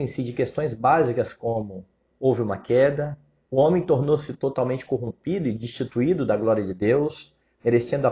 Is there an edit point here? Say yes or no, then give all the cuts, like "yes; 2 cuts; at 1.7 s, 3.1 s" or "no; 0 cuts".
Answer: yes; 2 cuts; at 2.1 s, 3.5 s